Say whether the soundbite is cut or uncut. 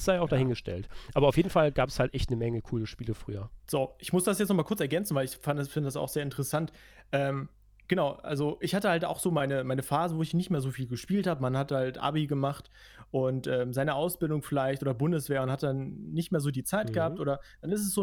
cut